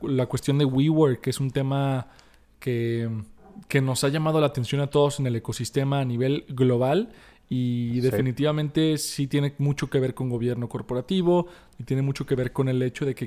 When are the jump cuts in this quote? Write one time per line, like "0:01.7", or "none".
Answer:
none